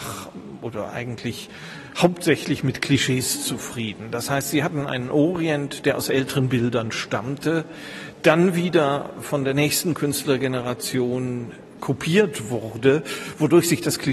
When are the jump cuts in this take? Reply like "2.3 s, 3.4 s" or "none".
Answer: none